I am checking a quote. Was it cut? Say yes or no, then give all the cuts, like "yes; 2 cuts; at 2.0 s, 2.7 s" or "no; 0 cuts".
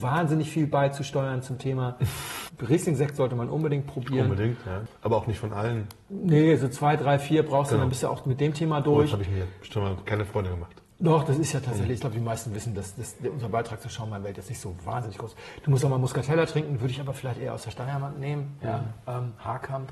no; 0 cuts